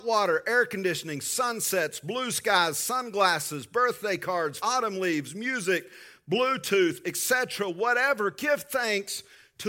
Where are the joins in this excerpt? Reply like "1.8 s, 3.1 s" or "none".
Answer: 4.6 s